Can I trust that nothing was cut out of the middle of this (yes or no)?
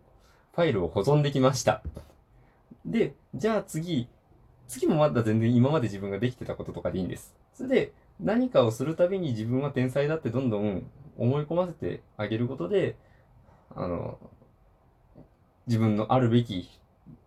no